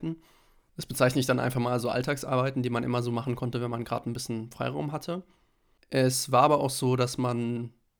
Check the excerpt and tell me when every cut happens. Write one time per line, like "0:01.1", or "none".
none